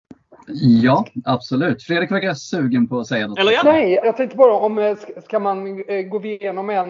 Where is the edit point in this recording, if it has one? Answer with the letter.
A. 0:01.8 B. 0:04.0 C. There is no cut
B